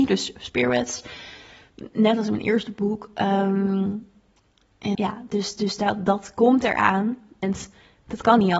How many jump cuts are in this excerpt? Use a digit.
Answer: 2